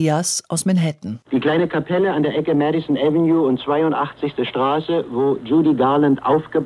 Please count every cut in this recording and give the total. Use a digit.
1